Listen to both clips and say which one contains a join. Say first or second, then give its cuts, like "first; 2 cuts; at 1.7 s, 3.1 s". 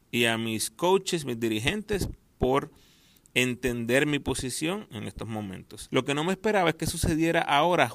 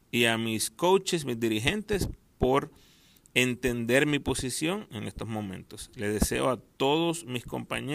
first; 1 cut; at 5.9 s